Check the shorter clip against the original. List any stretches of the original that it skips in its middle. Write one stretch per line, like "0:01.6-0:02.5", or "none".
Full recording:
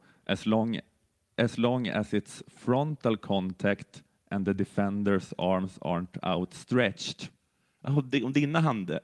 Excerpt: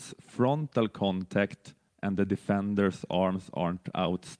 none